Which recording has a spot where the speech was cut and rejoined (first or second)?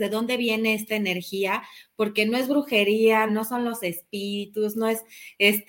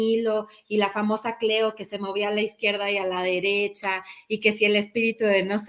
first